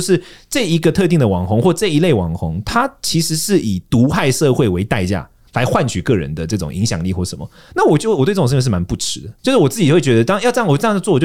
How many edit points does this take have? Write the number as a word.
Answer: zero